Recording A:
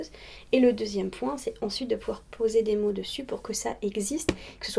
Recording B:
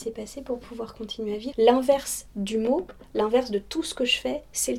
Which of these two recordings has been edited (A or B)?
B